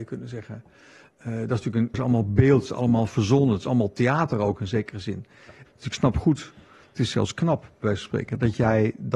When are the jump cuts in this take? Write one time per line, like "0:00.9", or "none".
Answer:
0:01.9
0:05.7